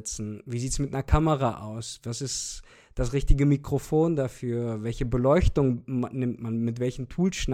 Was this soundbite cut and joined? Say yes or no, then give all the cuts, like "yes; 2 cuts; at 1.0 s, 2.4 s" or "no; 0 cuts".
no; 0 cuts